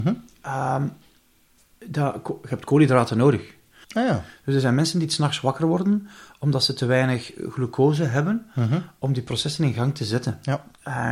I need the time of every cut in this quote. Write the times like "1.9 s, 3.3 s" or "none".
3.8 s

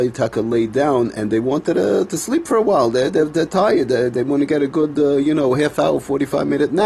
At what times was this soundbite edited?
none

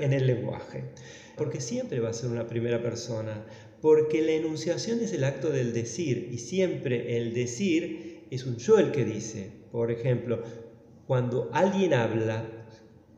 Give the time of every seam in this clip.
1.4 s

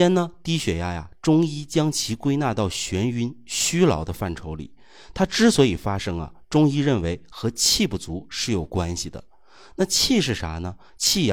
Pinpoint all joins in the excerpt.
none

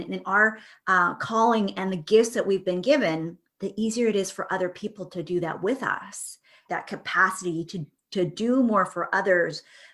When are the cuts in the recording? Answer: 6.7 s

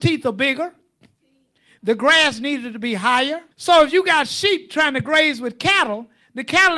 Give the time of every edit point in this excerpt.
3.5 s

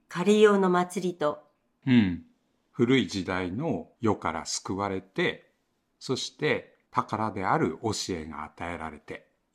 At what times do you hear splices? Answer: 1.8 s

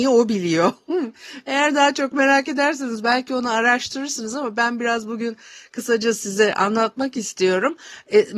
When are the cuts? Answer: none

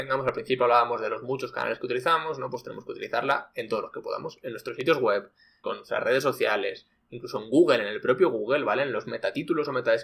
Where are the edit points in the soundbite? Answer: 5.6 s

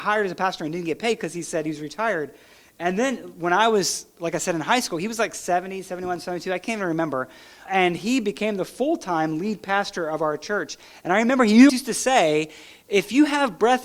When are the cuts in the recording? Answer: 7.7 s, 11.7 s

